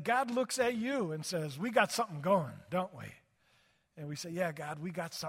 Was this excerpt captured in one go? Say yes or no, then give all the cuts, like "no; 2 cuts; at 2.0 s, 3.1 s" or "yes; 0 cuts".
yes; 0 cuts